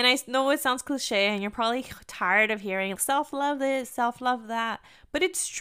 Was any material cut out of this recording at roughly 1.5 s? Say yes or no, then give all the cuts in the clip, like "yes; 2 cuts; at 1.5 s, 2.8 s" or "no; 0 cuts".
no; 1 cut; at 3.0 s